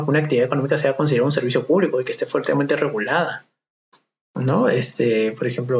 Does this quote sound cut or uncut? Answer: uncut